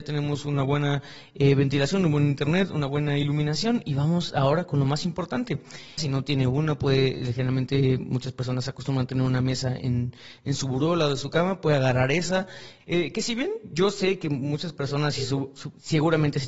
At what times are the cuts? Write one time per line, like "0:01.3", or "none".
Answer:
0:06.0
0:12.8